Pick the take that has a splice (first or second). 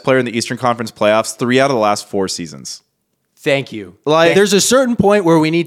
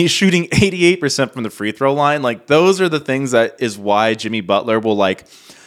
first